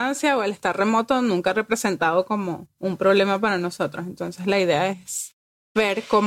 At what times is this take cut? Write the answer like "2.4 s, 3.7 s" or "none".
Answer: none